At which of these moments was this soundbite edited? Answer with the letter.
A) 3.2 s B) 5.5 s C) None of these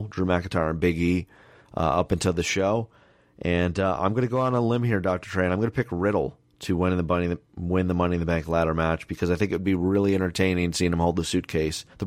C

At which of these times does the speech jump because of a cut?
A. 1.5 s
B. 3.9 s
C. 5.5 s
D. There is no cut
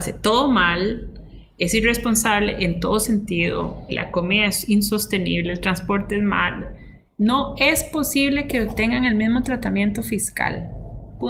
B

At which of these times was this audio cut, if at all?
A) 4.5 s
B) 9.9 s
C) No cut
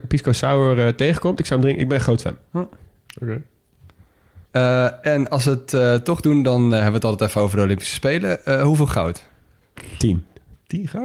A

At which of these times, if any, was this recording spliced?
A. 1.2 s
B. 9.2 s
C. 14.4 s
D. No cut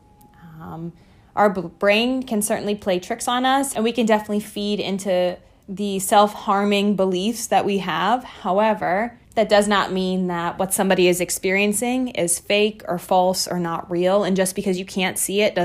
B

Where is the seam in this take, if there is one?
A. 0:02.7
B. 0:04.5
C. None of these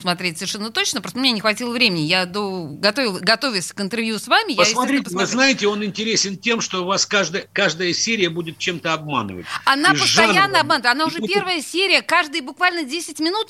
C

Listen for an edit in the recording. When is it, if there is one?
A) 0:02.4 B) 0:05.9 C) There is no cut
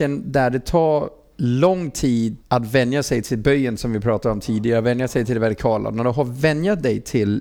A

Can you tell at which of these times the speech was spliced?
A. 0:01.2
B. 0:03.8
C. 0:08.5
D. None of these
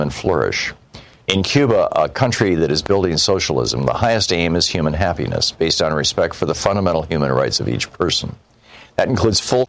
A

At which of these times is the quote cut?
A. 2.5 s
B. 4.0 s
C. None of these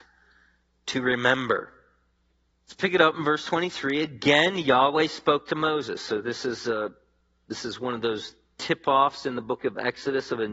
A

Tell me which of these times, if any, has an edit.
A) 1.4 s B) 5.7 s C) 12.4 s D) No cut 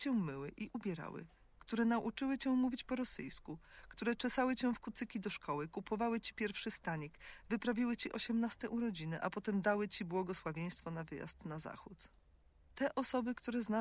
D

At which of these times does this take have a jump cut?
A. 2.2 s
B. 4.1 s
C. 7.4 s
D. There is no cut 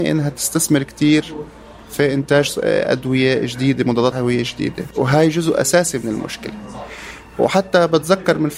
B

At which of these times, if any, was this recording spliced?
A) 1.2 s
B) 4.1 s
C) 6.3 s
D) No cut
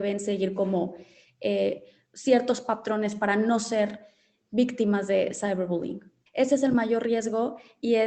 C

